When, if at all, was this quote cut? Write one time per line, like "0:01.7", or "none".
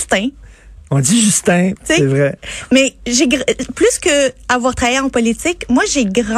0:01.7